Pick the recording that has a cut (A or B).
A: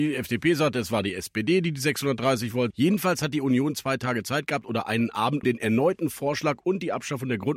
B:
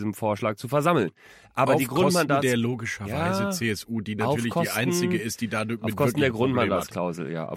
A